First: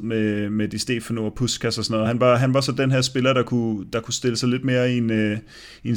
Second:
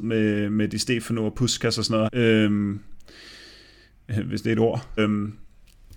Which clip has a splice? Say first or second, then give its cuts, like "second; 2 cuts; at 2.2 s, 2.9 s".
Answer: second; 2 cuts; at 2.1 s, 5.0 s